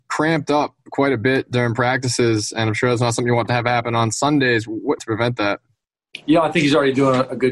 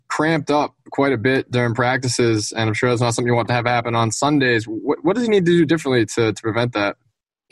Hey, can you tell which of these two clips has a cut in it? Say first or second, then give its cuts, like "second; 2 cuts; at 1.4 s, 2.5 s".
first; 1 cut; at 5.0 s